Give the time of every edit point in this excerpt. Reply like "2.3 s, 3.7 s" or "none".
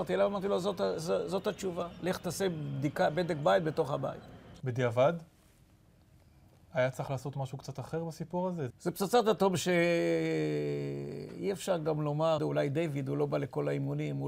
8.7 s, 12.4 s